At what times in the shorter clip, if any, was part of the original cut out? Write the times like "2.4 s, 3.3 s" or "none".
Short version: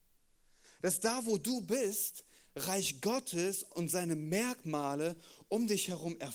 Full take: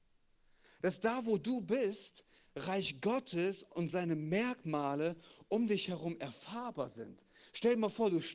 none